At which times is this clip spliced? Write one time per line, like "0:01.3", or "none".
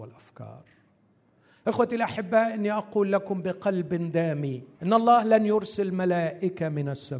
0:04.7